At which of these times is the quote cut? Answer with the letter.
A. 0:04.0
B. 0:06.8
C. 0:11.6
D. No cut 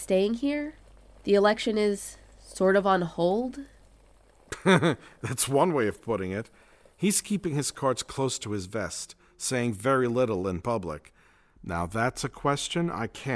C